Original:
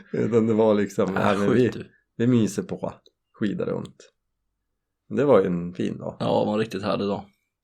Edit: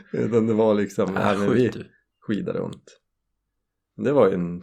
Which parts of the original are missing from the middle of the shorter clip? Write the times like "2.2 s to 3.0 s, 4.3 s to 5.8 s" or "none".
2.1 s to 3.2 s